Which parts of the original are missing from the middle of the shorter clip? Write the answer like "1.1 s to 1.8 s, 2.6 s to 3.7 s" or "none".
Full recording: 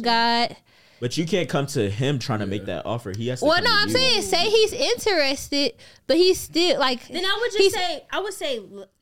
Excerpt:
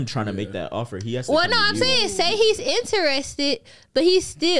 none